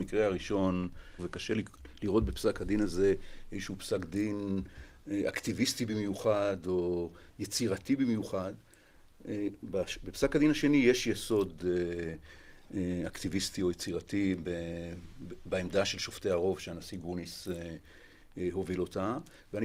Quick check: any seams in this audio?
yes; 1 cut; at 1.2 s

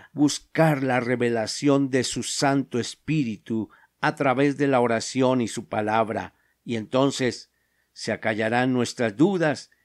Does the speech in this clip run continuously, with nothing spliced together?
yes; 0 cuts

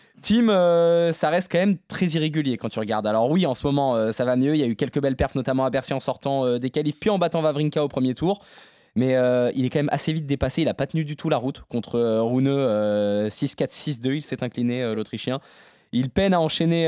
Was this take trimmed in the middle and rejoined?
no; 0 cuts

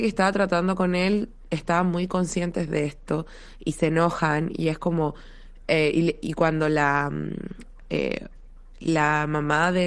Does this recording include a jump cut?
no; 0 cuts

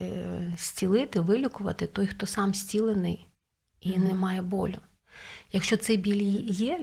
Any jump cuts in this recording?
no; 0 cuts

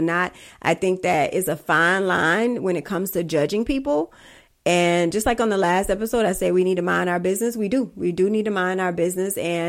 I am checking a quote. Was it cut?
yes; 1 cut; at 5.1 s

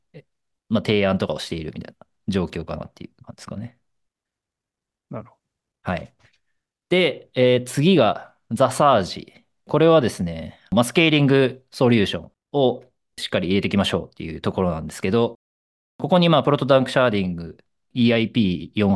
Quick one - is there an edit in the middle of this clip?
no; 0 cuts

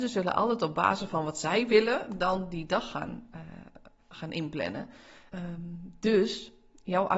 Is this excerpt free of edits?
no; 2 cuts; at 4.0 s, 5.3 s

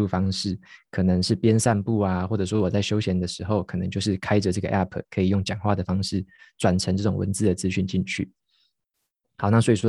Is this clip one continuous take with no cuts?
yes; 0 cuts

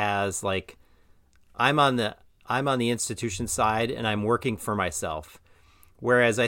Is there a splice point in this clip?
no; 0 cuts

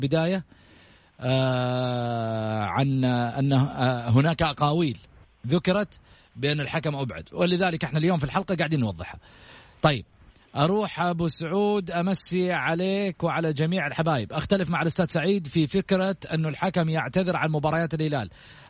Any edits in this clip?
no; 0 cuts

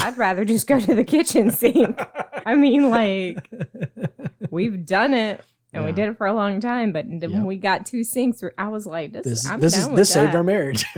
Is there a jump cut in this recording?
yes; 1 cut; at 2.4 s

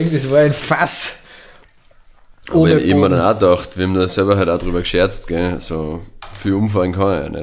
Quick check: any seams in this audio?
no; 0 cuts

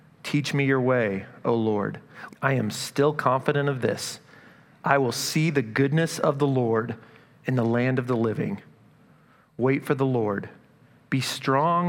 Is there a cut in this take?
yes; 1 cut; at 2.3 s

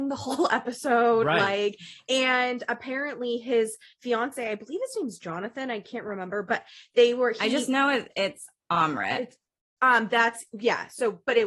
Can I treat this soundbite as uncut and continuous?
yes; 0 cuts

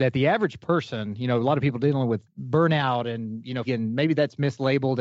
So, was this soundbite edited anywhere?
yes; 1 cut; at 3.6 s

